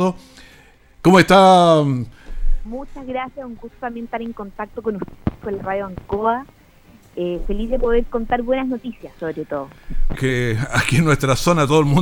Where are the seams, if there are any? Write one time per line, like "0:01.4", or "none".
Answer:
0:02.6
0:10.1